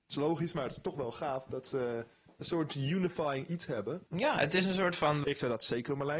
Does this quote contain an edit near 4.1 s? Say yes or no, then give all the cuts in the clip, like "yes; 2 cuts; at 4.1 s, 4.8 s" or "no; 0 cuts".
yes; 2 cuts; at 4.1 s, 5.2 s